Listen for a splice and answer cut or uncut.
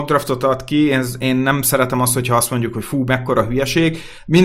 uncut